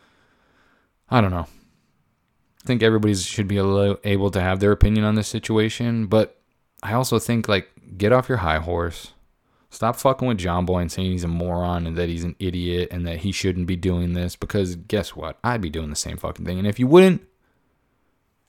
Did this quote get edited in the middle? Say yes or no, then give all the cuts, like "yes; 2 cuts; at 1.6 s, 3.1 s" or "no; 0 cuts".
yes; 1 cut; at 2.7 s